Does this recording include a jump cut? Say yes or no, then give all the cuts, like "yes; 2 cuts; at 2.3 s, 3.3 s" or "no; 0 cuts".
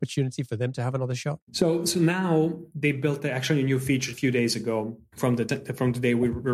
yes; 2 cuts; at 1.4 s, 4.1 s